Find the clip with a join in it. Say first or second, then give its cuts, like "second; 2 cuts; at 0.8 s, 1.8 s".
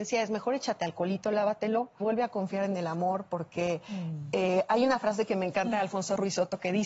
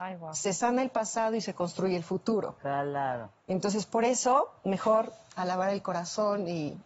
first; 1 cut; at 2.0 s